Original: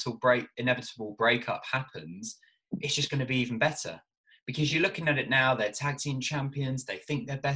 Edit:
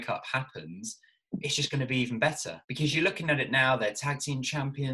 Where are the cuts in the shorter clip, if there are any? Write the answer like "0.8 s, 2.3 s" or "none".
2.6 s